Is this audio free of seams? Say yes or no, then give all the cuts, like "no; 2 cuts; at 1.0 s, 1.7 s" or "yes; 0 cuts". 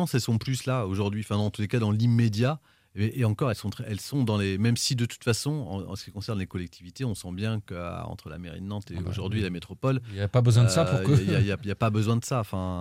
yes; 0 cuts